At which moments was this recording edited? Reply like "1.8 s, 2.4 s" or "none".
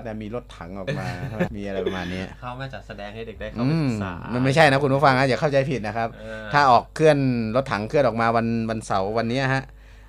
1.5 s